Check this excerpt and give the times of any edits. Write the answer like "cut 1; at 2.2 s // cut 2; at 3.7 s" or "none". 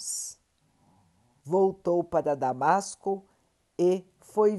cut 1; at 1.4 s